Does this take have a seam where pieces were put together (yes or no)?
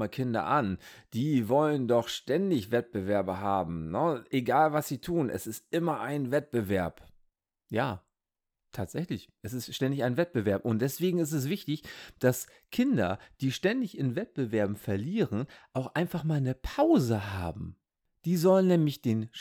no